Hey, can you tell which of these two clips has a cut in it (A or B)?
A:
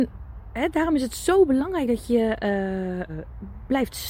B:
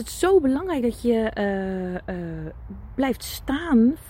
A